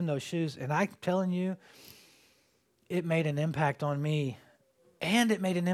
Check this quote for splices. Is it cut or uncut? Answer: uncut